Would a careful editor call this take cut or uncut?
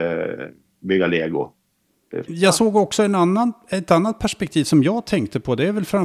cut